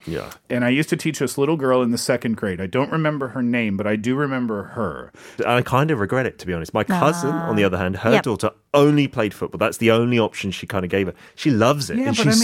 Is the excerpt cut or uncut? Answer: cut